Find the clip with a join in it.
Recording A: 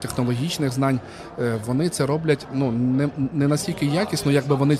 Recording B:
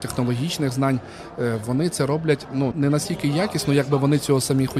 B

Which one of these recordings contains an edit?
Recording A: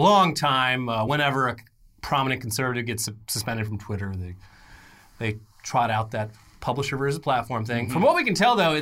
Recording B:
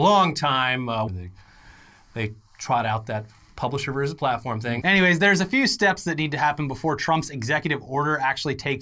B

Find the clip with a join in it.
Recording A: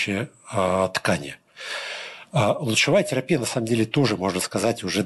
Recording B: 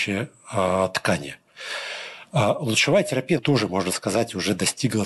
B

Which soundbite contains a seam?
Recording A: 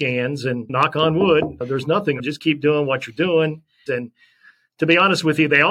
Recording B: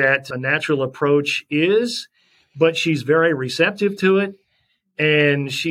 A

